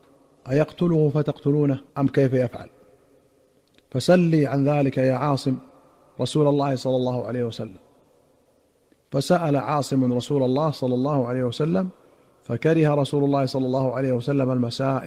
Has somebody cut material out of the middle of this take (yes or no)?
yes